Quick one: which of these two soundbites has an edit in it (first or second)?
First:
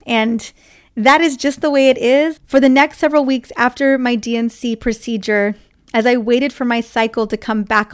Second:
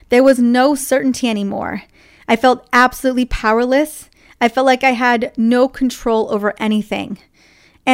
first